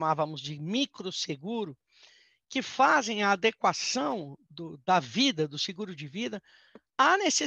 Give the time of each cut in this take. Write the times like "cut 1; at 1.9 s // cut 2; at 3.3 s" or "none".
cut 1; at 4.5 s